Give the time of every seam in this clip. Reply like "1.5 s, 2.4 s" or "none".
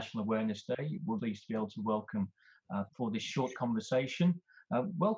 1.2 s, 2.9 s